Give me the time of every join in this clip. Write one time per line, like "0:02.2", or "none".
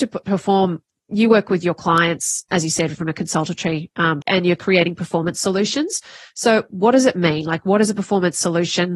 0:04.2